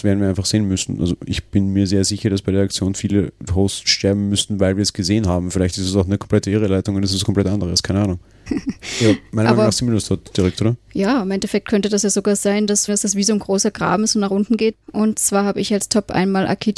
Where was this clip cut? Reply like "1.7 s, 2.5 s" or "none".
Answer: 8.5 s, 12.9 s, 14.7 s

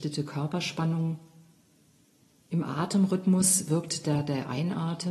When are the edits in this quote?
none

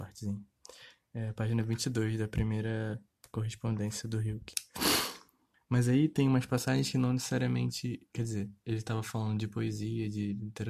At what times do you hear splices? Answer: 5.5 s

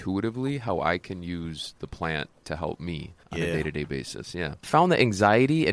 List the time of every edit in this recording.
3.2 s

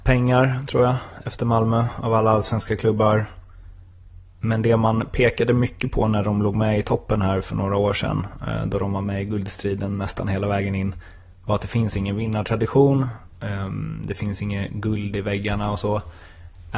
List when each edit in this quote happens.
none

